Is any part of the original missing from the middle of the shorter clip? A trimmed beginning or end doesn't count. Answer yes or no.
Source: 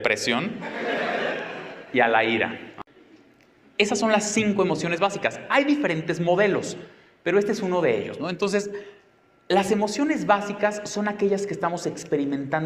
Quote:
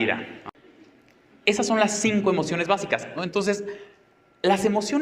yes